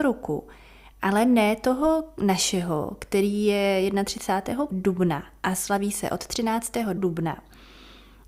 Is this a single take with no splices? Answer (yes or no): no